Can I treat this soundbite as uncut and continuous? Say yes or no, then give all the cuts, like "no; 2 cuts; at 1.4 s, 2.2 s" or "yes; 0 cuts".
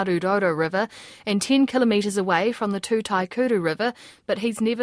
yes; 0 cuts